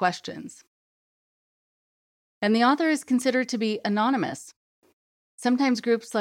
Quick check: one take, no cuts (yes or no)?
yes